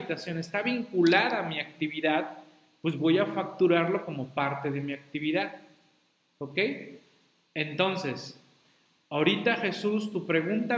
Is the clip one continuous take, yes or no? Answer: yes